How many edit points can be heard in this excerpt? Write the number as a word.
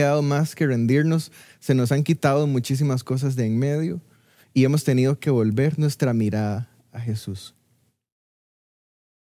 zero